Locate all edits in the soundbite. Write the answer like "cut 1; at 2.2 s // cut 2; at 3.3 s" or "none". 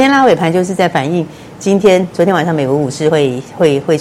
none